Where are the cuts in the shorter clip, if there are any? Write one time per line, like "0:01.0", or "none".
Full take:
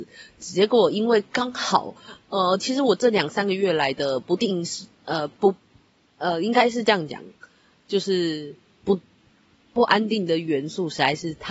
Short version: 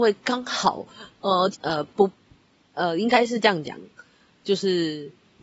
0:01.5